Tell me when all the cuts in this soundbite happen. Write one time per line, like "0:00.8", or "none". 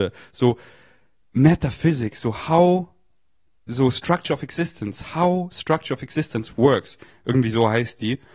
none